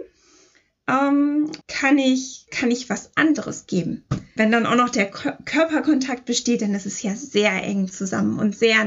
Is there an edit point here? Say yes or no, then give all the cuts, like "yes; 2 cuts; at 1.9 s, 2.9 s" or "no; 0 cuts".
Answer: yes; 2 cuts; at 1.6 s, 4.4 s